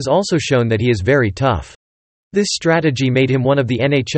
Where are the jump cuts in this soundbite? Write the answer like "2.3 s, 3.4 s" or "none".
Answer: 2.2 s